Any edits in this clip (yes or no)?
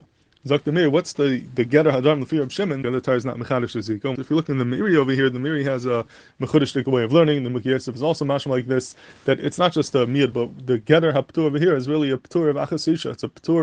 yes